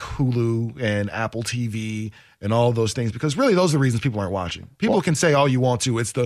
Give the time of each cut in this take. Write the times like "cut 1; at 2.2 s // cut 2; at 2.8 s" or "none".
none